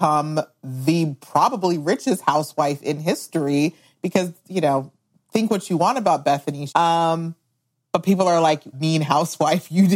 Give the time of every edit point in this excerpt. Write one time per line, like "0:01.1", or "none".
0:06.7
0:08.7